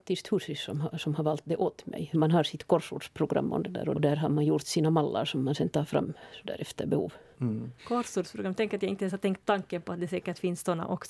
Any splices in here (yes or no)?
yes